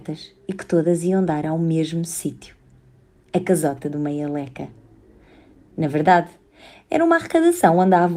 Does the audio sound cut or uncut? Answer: uncut